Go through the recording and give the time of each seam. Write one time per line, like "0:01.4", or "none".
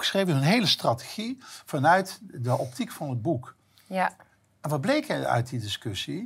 none